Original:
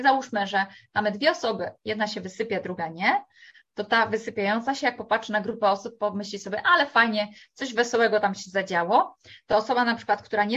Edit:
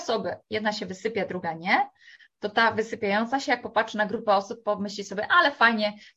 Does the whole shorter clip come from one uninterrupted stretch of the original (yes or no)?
yes